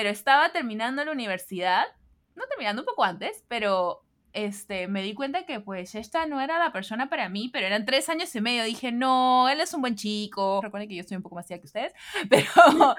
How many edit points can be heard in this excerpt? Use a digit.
1